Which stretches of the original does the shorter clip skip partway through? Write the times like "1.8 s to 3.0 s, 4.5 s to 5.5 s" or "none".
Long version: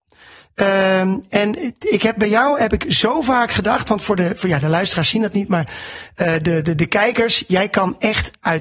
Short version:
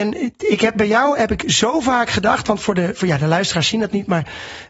none

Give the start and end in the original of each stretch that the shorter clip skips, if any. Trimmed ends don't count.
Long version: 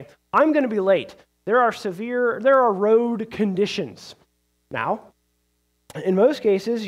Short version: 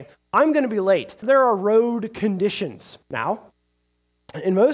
1.2 s to 2.4 s, 4.2 s to 4.6 s

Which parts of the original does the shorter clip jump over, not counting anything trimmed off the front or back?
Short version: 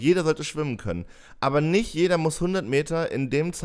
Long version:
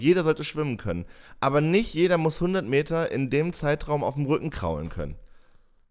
none

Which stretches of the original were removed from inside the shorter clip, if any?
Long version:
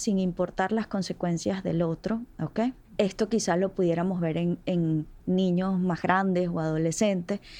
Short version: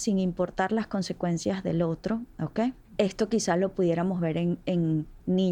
none

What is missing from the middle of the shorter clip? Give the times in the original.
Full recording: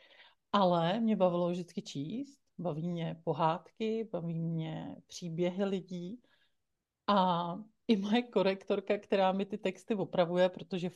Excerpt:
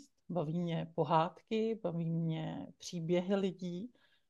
none

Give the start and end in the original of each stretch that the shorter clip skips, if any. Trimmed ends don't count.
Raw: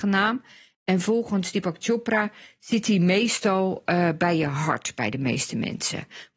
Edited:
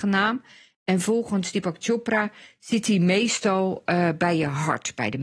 none

